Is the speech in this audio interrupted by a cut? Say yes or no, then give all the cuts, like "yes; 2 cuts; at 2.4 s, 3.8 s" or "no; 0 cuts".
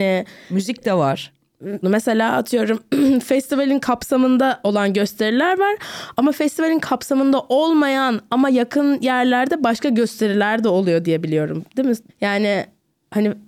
yes; 2 cuts; at 1.8 s, 12.1 s